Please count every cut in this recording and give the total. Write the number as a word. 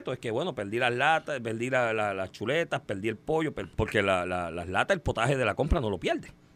one